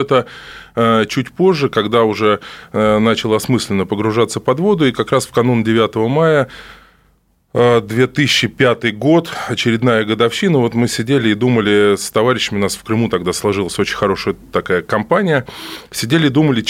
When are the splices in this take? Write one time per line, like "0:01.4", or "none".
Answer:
none